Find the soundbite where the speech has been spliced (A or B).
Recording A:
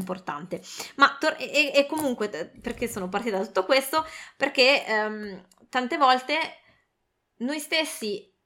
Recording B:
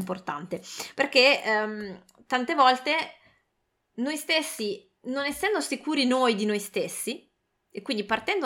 B